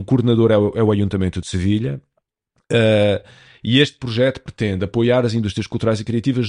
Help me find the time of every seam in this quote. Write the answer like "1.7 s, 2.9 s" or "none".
none

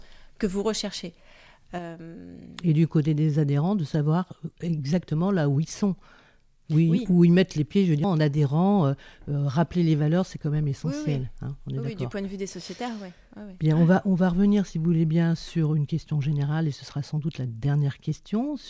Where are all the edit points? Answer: 8.0 s

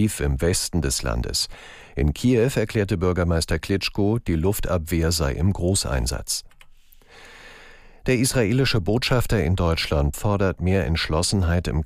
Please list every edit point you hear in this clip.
10.1 s

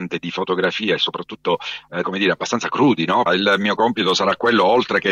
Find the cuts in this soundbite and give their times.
2.0 s, 3.2 s

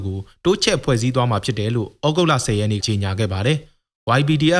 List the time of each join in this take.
2.8 s

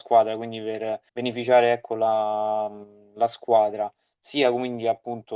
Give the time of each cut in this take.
1.1 s

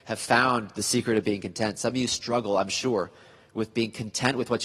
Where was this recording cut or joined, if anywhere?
none

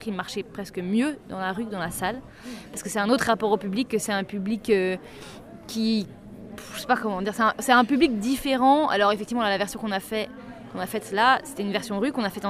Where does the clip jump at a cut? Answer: none

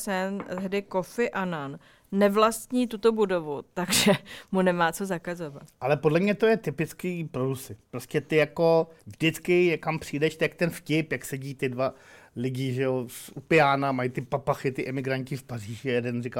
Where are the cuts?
7.8 s, 9.0 s

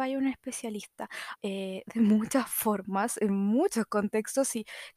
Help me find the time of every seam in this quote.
1.4 s

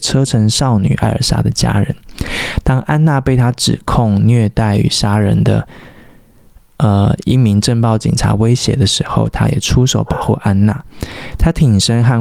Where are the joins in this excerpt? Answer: none

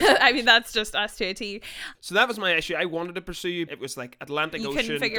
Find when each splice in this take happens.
2.0 s, 3.7 s

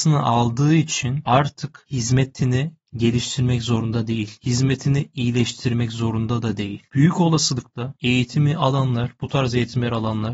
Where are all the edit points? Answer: none

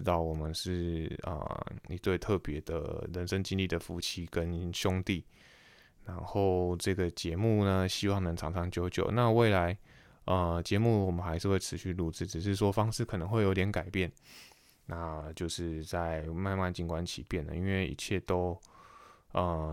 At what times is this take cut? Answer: none

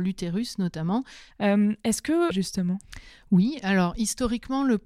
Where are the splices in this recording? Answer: 1.3 s, 2.3 s

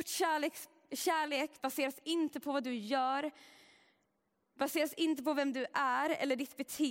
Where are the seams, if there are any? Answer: 1.6 s

